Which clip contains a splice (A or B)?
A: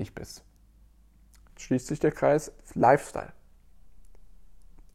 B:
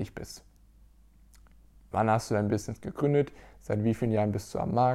A